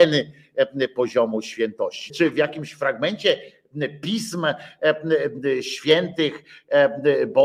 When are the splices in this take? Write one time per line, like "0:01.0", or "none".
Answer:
0:02.1